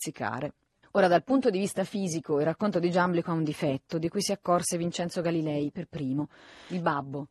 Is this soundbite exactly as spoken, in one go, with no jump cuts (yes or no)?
yes